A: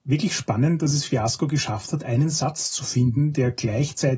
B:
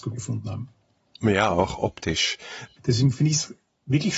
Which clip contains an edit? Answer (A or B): B